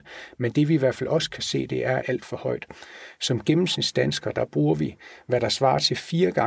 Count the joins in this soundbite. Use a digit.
1